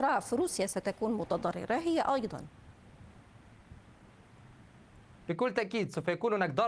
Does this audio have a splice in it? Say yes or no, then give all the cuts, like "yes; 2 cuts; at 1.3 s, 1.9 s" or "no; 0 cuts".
yes; 1 cut; at 5.2 s